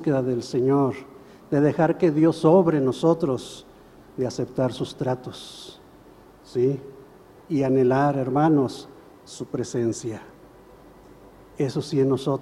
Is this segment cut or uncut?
uncut